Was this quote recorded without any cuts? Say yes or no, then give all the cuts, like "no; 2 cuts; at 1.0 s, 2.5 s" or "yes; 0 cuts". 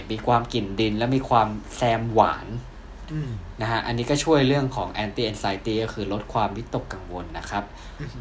yes; 0 cuts